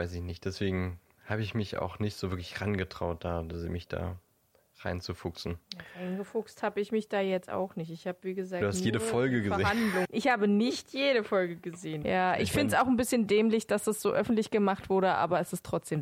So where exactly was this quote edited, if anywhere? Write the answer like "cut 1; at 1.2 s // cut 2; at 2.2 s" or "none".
cut 1; at 5.6 s // cut 2; at 10.0 s // cut 3; at 12.0 s